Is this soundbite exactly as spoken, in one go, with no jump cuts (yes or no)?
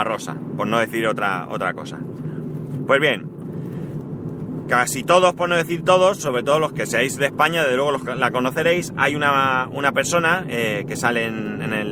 yes